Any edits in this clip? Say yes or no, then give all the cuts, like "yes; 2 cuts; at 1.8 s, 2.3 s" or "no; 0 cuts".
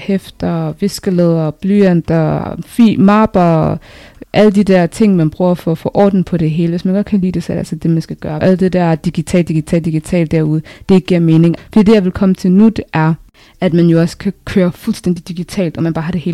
yes; 3 cuts; at 4.2 s, 8.4 s, 11.6 s